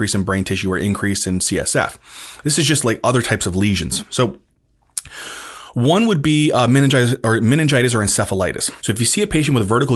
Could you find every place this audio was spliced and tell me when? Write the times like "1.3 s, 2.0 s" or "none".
8.8 s